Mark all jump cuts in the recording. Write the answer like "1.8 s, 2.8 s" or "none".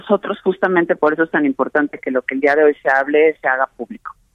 none